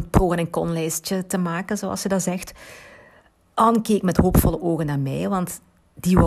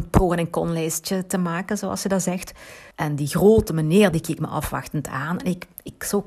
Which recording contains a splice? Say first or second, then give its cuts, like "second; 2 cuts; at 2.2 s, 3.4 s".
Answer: second; 2 cuts; at 2.9 s, 4.1 s